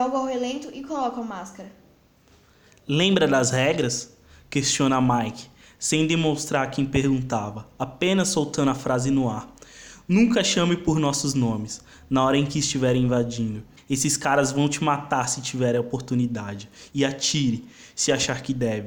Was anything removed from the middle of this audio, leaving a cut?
yes; 2 cuts; at 13.8 s, 16.9 s

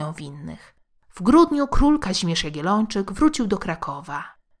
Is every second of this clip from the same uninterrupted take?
no; 1 cut; at 1.0 s

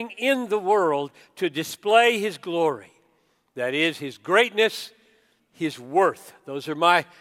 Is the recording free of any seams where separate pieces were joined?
no; 1 cut; at 5.4 s

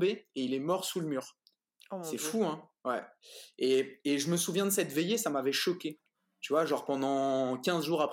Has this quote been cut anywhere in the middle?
no; 0 cuts

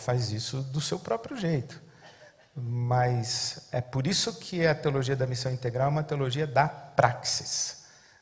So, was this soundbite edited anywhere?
yes; 1 cut; at 3.7 s

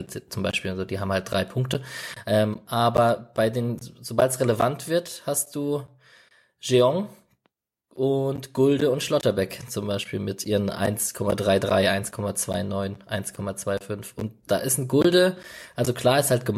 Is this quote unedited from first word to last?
yes; 0 cuts

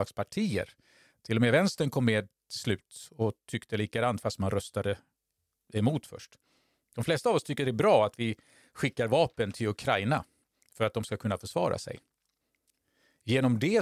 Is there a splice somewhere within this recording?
no; 0 cuts

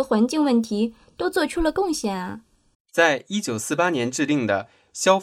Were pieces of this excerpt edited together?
yes; 1 cut; at 2.7 s

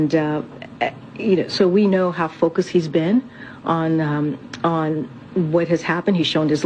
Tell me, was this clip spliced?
no; 0 cuts

